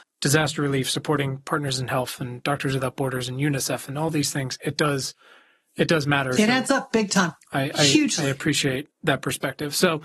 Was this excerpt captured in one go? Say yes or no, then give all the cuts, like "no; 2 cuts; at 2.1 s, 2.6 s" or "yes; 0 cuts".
yes; 0 cuts